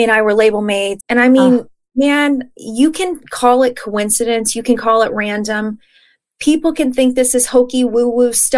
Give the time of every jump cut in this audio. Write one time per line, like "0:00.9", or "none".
0:01.0